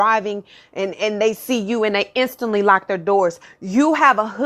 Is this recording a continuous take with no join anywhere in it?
yes; 0 cuts

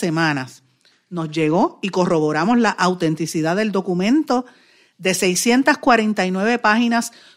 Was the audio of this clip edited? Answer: no; 0 cuts

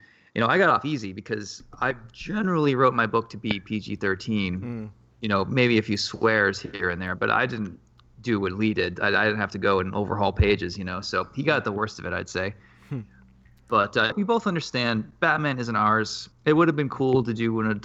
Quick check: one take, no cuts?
no; 2 cuts; at 14.1 s, 16.3 s

